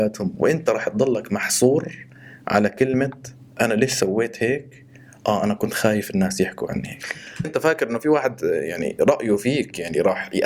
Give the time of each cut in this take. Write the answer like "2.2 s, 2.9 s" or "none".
7.4 s